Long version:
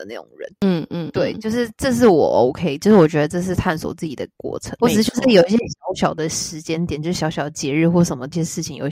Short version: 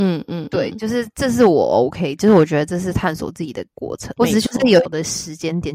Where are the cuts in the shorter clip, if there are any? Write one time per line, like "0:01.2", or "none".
0:04.9